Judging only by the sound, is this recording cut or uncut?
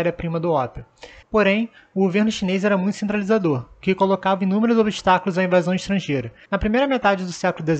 cut